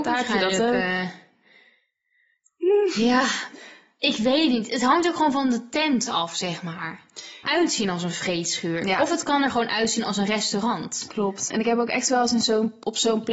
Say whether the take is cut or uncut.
cut